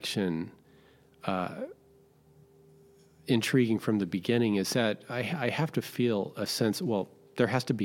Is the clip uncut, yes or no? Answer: yes